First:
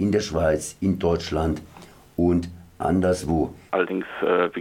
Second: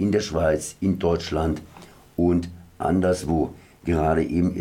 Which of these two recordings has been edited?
first; 1 cut; at 3.7 s

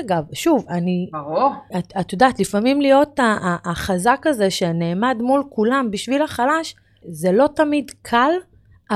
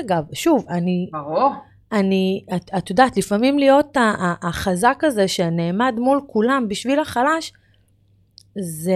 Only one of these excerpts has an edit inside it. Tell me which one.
first; 2 cuts; at 1.7 s, 7.0 s

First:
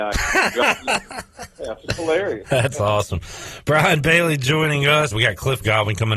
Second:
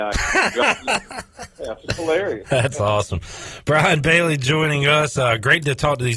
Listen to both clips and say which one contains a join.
first; 1 cut; at 5.1 s

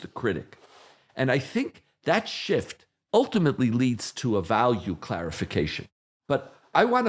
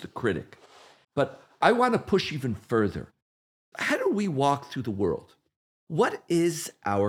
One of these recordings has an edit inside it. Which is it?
second; 1 cut; at 1.0 s

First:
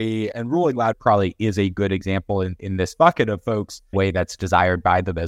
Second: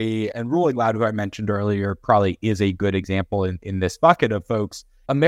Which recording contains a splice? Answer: first; 2 cuts; at 0.9 s, 3.9 s

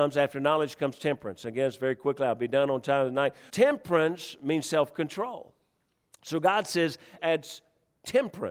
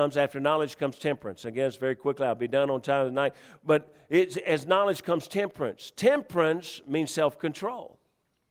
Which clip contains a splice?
first; 2 cuts; at 3.5 s, 7.2 s

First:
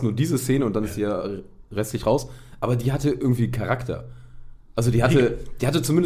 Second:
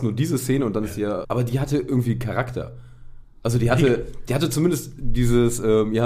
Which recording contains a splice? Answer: second; 1 cut; at 1.2 s

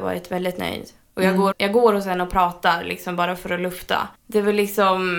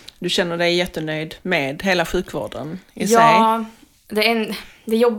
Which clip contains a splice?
first; 2 cuts; at 1.5 s, 4.1 s

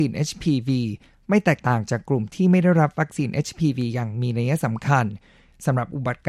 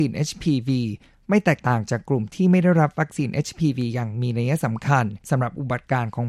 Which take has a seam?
second; 1 cut; at 5.2 s

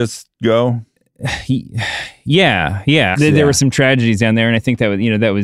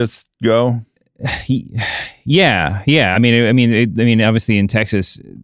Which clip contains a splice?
first; 1 cut; at 3.1 s

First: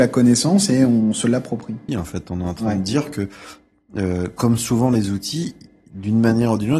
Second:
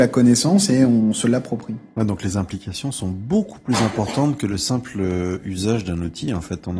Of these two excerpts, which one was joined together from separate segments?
first; 1 cut; at 1.9 s

